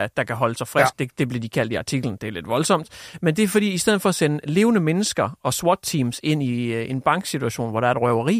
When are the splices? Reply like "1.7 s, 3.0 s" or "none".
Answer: 0.9 s